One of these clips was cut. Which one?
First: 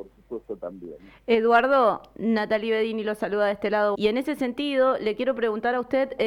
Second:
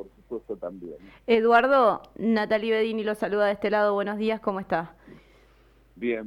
first; 1 cut; at 3.9 s

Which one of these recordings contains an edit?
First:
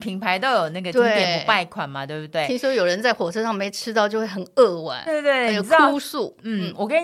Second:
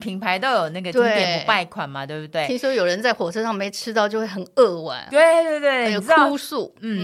first; 1 cut; at 5.1 s

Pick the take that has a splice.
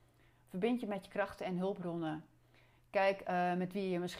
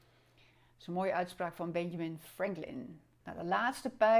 second; 1 cut; at 3.2 s

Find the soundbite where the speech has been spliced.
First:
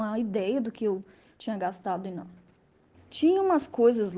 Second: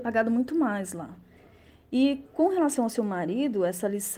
first; 1 cut; at 2.9 s

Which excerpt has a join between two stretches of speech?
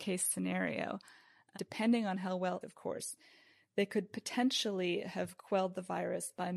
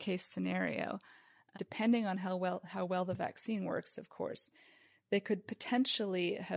first; 1 cut; at 2.6 s

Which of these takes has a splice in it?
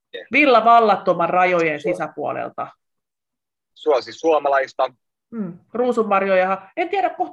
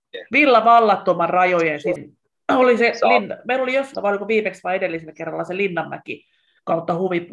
second; 2 cuts; at 2.0 s, 3.9 s

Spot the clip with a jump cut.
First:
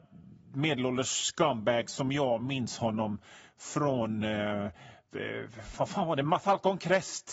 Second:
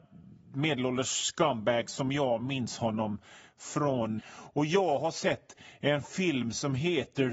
second; 1 cut; at 4.2 s

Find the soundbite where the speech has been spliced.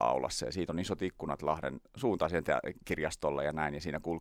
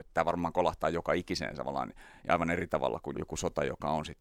second; 1 cut; at 3.1 s

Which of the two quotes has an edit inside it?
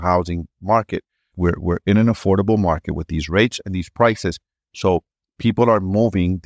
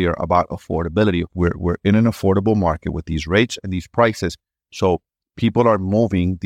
first; 1 cut; at 1.3 s

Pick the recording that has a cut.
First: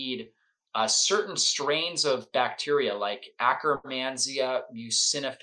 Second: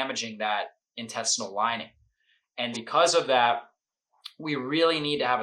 second; 1 cut; at 2.7 s

